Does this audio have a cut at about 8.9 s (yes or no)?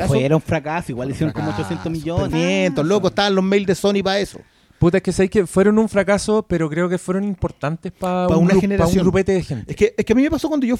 no